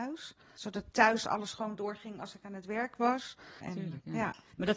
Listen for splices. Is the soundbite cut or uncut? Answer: cut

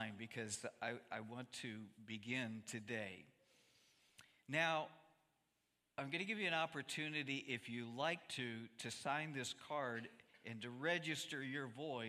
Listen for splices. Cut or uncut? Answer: uncut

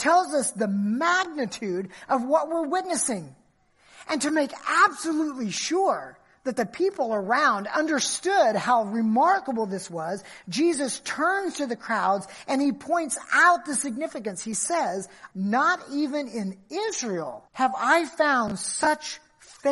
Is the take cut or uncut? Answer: cut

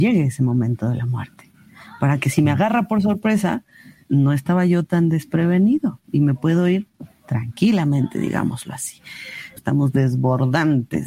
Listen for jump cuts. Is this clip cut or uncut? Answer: cut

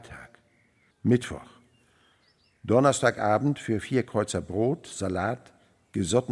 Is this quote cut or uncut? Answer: cut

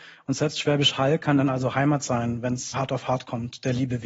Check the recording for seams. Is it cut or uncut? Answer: cut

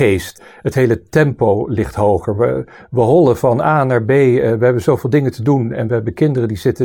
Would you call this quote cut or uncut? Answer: uncut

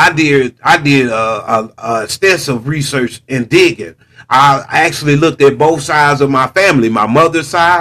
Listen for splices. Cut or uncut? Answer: uncut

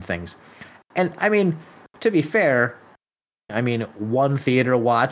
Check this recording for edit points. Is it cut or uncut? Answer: cut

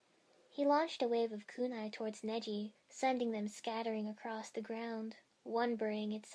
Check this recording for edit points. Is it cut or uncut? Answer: cut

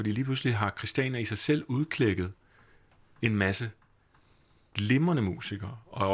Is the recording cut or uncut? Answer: uncut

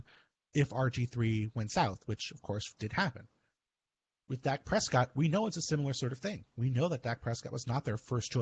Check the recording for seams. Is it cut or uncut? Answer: cut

